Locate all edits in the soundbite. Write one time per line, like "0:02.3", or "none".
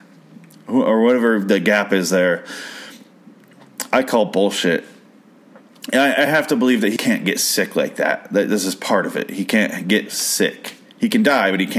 0:07.0